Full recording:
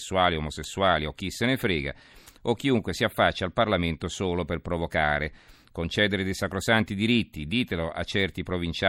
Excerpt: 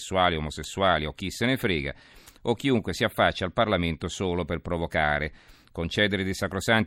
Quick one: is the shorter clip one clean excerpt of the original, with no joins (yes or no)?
yes